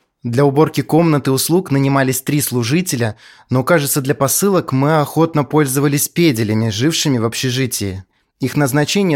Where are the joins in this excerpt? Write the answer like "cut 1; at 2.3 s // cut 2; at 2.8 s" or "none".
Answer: none